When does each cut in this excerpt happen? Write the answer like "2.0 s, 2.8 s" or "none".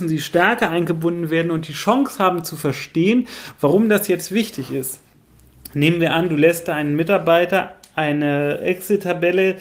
none